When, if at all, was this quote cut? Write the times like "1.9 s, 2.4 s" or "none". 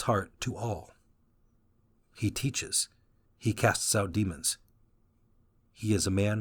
3.3 s